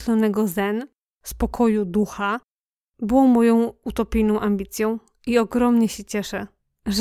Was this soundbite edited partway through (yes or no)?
no